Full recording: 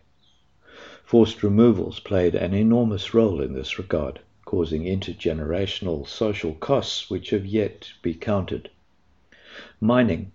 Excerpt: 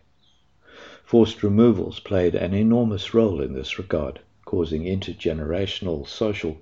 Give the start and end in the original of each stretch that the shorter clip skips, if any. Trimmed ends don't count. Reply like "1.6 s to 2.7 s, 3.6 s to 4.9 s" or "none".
none